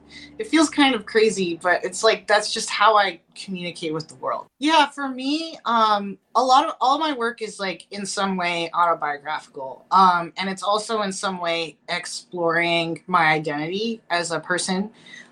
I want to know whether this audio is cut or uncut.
cut